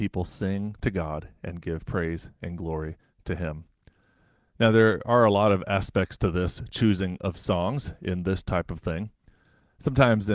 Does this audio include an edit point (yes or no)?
no